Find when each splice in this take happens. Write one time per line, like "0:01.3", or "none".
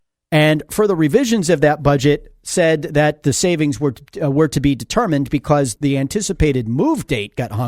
0:05.8